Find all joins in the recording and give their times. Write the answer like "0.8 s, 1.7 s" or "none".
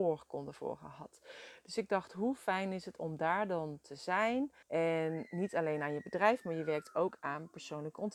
4.6 s